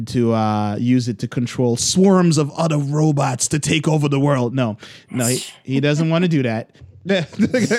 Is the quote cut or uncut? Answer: cut